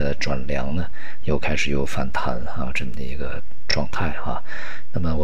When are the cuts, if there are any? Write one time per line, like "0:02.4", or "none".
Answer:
none